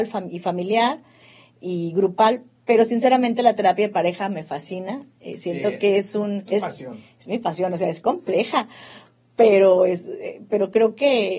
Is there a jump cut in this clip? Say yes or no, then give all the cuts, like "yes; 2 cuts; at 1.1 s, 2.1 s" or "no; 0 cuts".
no; 0 cuts